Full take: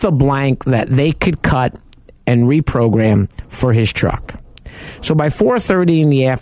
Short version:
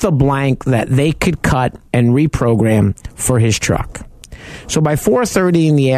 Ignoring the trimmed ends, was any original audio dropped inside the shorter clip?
yes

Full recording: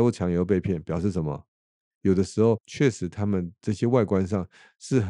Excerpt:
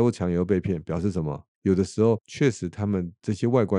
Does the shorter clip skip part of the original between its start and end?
yes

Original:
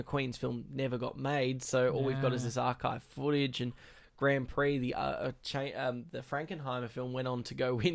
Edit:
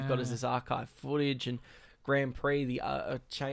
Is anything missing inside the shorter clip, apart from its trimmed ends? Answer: no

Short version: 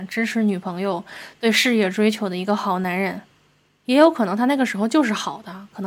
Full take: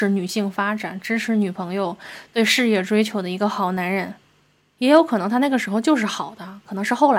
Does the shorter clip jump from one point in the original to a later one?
no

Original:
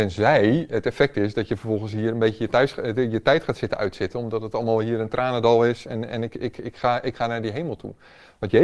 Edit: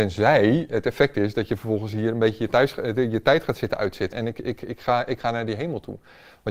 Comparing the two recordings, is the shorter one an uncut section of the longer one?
no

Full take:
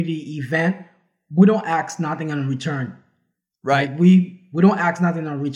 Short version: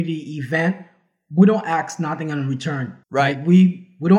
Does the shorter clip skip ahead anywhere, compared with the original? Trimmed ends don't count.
yes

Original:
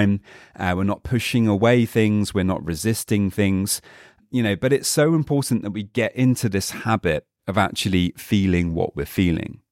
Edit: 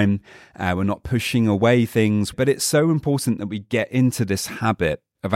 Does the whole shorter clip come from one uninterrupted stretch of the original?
no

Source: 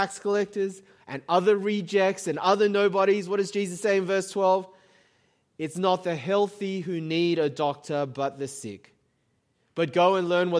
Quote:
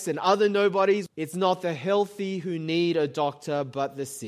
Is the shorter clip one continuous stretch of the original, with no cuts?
no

